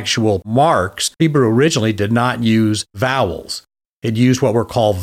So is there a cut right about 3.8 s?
no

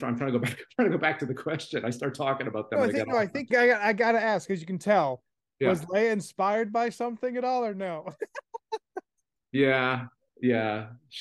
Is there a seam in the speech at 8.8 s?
no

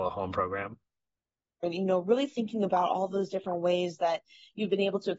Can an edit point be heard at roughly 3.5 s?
no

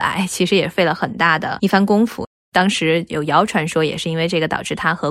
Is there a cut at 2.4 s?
no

